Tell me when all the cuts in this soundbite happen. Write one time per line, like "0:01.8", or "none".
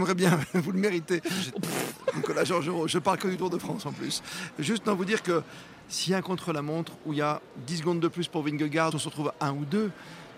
0:01.5
0:08.9